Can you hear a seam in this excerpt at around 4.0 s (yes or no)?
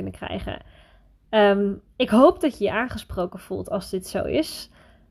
no